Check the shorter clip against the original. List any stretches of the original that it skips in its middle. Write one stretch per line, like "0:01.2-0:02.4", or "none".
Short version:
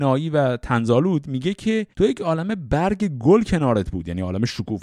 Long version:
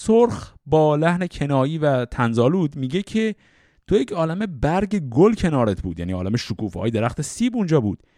0:03.4-0:03.8